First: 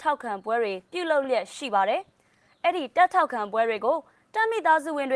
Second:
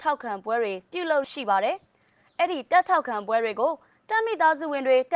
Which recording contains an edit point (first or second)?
second